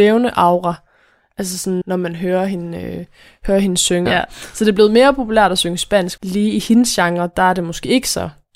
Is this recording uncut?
no; 3 cuts; at 1.8 s, 4.1 s, 6.2 s

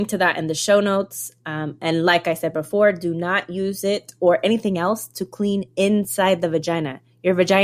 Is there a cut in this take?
no; 0 cuts

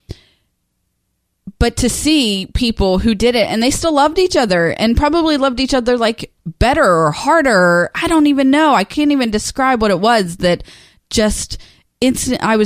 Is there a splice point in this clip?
no; 0 cuts

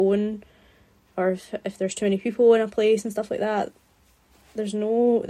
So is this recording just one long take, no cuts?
yes; 0 cuts

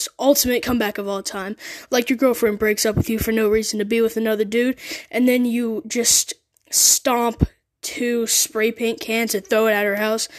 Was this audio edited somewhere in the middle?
no; 0 cuts

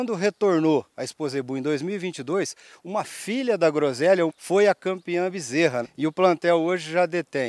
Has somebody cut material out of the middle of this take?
yes; 2 cuts; at 4.3 s, 5.8 s

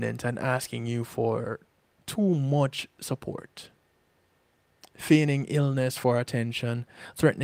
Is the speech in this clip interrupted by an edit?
no; 0 cuts

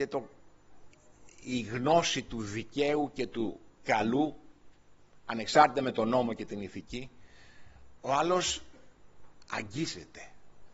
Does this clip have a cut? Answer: yes; 1 cut; at 8.0 s

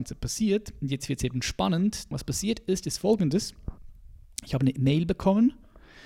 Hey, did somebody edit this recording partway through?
yes; 1 cut; at 2.1 s

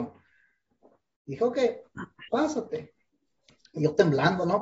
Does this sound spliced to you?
yes; 1 cut; at 2.3 s

